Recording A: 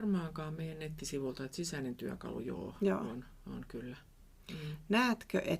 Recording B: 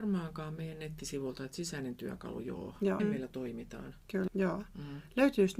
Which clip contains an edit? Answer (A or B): B